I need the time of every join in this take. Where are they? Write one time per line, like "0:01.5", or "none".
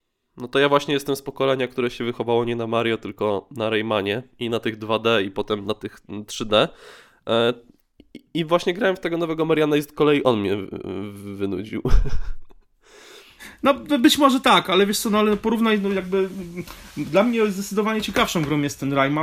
none